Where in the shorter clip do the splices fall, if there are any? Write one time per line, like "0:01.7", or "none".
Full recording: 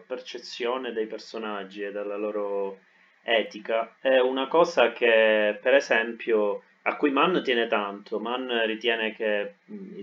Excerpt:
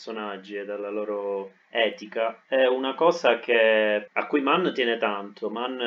0:01.6
0:04.1